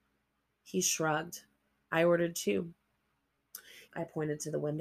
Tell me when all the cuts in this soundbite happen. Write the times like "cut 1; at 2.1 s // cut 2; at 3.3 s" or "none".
cut 1; at 3.9 s